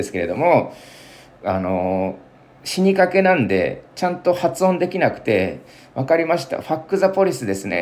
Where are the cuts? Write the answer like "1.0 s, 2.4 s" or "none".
none